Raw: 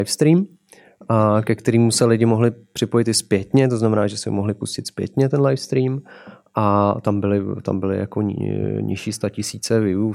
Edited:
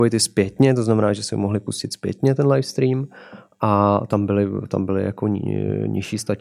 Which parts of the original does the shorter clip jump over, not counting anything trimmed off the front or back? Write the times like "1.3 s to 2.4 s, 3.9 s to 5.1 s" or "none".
none